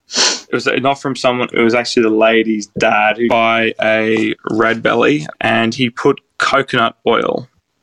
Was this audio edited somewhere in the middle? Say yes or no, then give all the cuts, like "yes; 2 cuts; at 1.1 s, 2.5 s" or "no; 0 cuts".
yes; 2 cuts; at 1.5 s, 5.3 s